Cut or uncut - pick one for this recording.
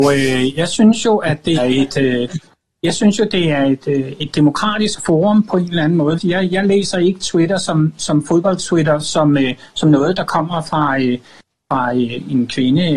cut